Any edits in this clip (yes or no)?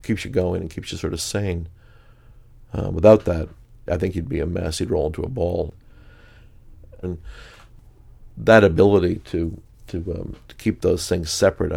yes